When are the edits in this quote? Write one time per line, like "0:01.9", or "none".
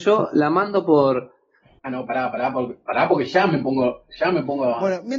0:01.8